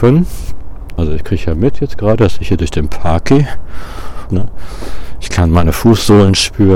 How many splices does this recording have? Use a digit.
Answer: 2